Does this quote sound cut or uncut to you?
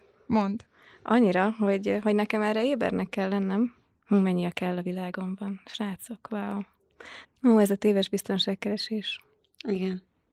cut